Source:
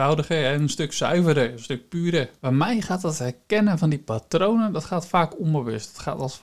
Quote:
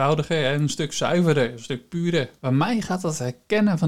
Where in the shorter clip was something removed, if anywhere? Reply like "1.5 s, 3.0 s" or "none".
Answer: none